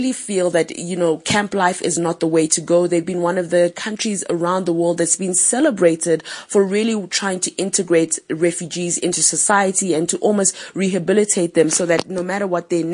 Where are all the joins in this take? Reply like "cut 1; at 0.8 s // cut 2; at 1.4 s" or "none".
none